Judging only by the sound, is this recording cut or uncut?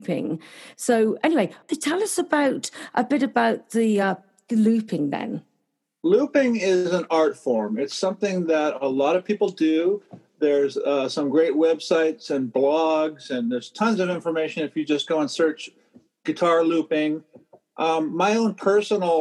uncut